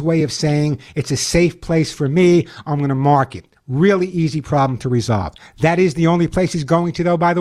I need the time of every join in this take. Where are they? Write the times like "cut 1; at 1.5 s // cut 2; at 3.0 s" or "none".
none